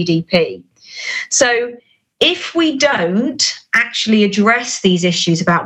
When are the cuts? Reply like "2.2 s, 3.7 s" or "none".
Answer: none